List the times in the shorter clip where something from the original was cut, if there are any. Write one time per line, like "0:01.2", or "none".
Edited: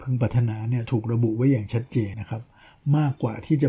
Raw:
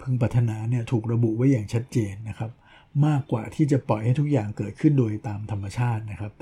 0:02.1